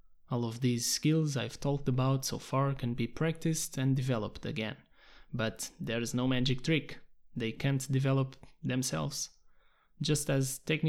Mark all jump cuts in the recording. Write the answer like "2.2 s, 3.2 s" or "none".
none